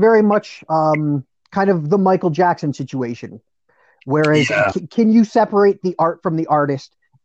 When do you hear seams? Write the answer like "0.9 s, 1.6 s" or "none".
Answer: none